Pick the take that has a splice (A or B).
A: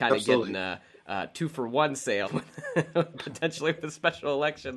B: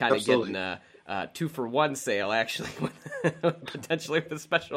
A